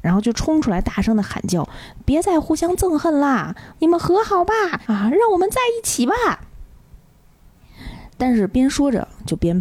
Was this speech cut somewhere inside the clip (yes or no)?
yes